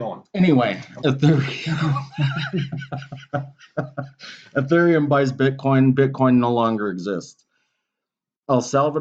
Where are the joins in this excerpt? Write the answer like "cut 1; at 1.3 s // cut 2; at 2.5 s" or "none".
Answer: cut 1; at 1.0 s